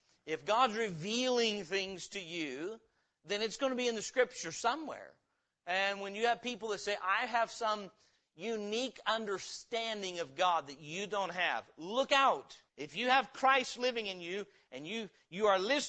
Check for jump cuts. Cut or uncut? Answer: cut